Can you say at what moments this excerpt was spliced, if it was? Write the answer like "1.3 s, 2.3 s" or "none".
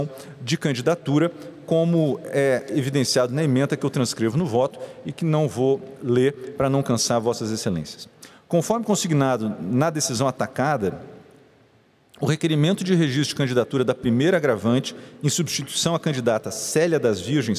none